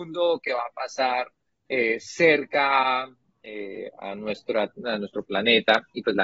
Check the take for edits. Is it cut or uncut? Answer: uncut